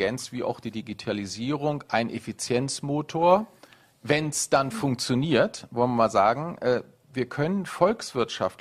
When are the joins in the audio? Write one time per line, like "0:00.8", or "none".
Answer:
none